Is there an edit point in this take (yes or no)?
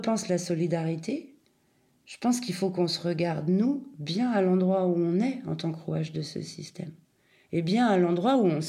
no